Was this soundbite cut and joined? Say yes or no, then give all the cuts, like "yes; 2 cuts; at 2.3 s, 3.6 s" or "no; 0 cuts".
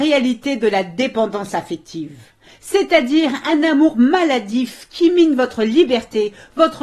no; 0 cuts